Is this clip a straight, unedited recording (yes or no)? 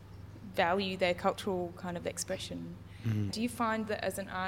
no